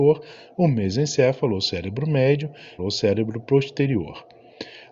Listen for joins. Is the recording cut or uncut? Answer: cut